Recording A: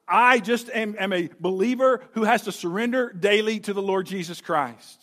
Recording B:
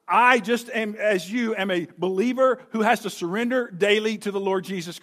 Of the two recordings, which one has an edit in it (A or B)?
A